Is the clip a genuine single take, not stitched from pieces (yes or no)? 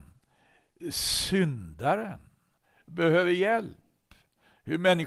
yes